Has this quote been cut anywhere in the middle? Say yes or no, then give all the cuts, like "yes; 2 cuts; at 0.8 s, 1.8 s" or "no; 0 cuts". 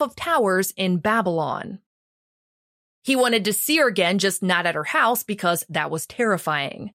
yes; 1 cut; at 2.9 s